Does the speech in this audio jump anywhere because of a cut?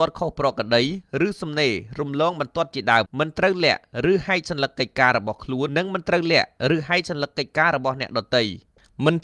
yes; 2 cuts; at 3.1 s, 5.7 s

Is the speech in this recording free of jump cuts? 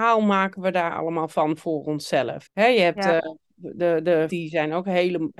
no; 2 cuts; at 2.5 s, 4.3 s

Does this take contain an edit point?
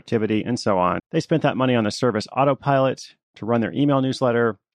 yes; 1 cut; at 1.0 s

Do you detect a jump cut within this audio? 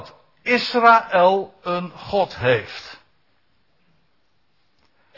no; 0 cuts

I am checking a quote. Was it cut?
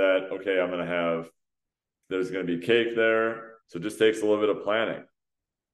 yes; 1 cut; at 3.6 s

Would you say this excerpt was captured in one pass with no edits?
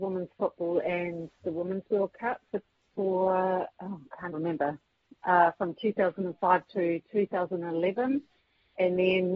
no; 1 cut; at 4.3 s

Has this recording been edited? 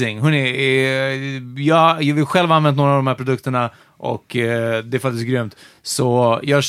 no; 0 cuts

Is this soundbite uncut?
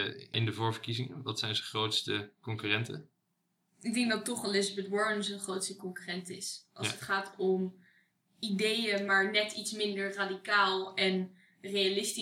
yes; 0 cuts

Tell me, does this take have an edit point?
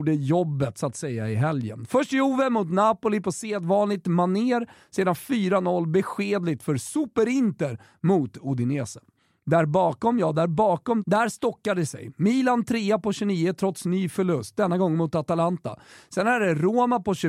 no; 0 cuts

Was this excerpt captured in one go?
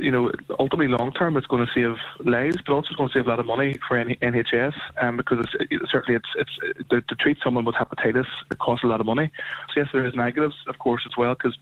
no; 1 cut; at 9.7 s

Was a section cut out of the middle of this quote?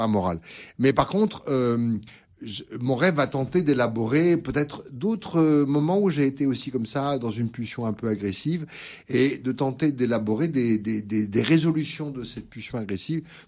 no; 0 cuts

